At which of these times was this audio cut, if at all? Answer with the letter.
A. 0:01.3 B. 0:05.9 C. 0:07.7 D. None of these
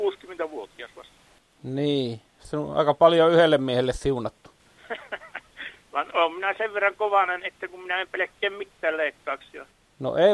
D